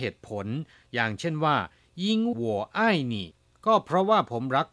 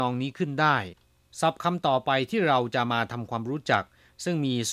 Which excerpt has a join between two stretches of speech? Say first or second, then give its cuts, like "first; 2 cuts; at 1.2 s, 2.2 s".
first; 1 cut; at 2.3 s